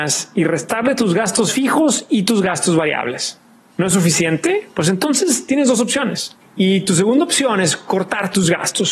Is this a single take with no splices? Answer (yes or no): no